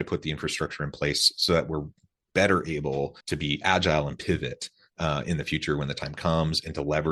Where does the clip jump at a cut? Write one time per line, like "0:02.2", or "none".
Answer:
0:03.2